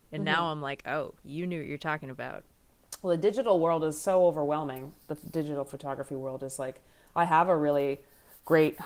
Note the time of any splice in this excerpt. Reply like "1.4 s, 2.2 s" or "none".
none

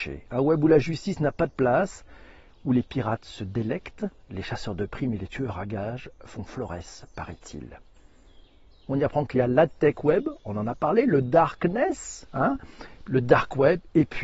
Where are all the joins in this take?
8.9 s

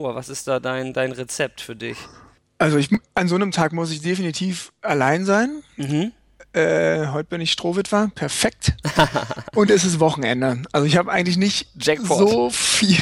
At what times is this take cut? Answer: none

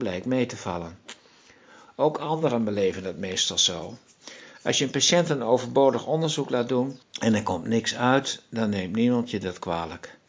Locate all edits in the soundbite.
none

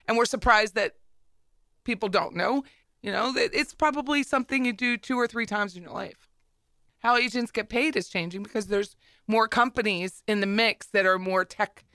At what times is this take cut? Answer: 2.8 s, 6.9 s

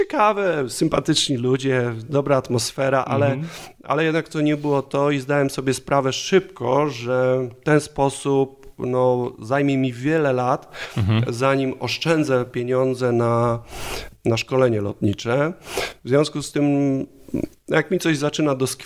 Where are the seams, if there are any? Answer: none

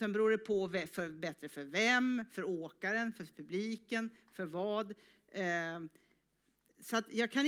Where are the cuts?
none

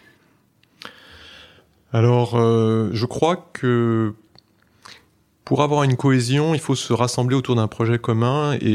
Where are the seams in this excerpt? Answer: none

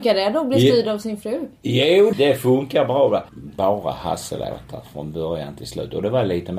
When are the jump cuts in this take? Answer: 2.1 s, 3.3 s

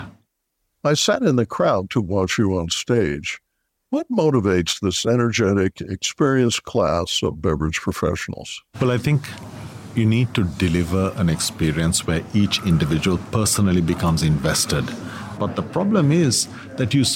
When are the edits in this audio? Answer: 3.8 s, 8.7 s, 15.4 s

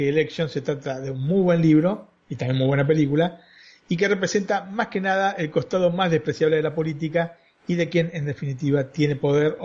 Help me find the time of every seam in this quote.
none

